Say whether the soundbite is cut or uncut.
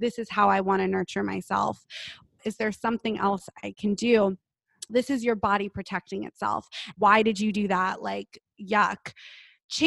cut